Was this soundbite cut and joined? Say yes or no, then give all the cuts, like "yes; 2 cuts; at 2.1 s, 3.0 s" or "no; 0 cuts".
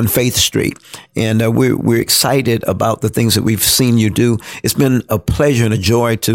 no; 0 cuts